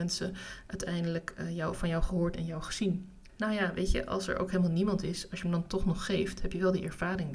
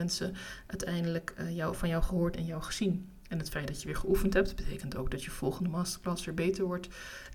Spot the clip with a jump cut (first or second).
first